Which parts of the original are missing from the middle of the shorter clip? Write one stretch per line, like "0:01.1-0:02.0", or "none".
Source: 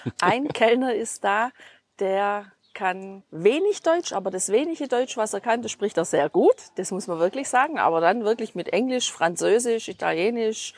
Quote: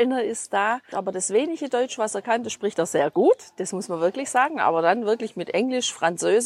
0:01.6-0:04.1